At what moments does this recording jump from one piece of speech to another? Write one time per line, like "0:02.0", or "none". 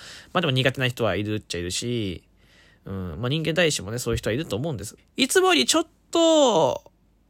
0:05.0